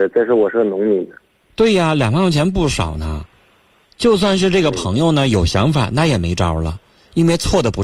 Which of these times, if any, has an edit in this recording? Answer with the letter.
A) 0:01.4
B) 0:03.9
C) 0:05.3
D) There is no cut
B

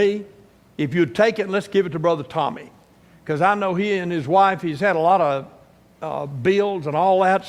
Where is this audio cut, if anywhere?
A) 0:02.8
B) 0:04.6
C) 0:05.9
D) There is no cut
D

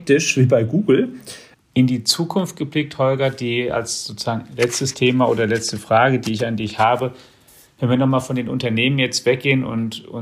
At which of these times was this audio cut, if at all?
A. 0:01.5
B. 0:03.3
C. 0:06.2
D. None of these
A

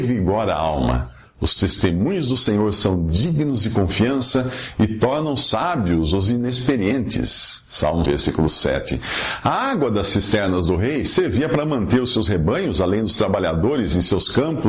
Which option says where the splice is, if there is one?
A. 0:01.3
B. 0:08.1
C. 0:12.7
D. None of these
B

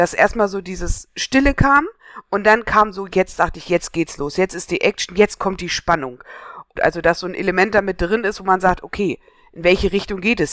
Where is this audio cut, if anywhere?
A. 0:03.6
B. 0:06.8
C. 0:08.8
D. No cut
B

